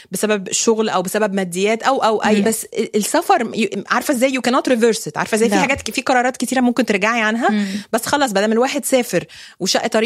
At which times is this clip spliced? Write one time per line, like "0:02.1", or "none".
0:02.4